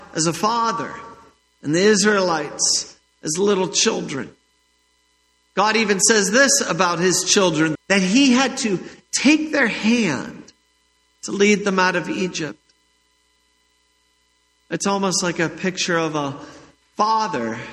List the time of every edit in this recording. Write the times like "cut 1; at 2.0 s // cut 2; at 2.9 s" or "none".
cut 1; at 7.8 s